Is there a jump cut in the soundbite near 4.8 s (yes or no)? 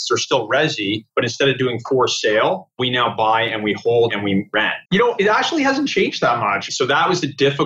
yes